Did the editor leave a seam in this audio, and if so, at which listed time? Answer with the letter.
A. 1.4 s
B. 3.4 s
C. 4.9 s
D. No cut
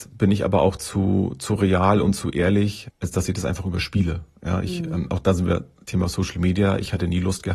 D